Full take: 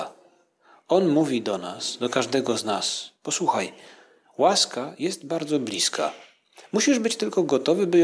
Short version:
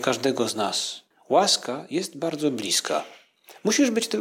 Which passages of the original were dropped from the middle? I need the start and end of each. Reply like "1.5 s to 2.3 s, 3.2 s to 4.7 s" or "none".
3.2 s to 4.2 s